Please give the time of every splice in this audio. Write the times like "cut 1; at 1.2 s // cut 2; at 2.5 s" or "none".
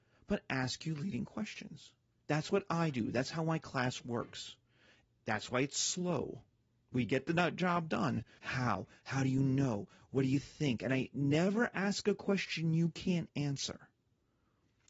cut 1; at 8.4 s